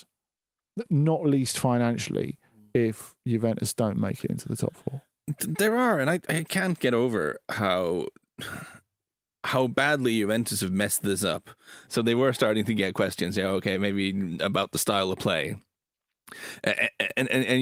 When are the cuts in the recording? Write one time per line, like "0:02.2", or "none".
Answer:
0:11.9